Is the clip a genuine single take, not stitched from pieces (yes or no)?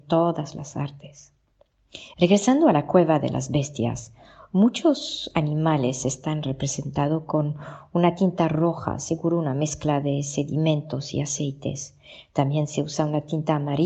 no